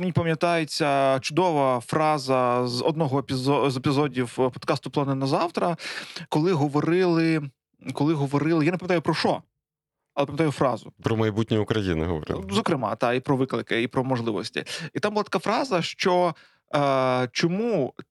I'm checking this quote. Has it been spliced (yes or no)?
no